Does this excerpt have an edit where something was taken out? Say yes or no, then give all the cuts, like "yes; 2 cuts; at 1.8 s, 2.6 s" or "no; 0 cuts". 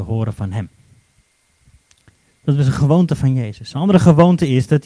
no; 0 cuts